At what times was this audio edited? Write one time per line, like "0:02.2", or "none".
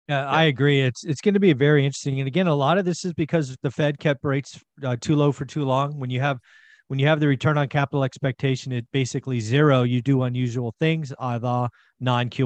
none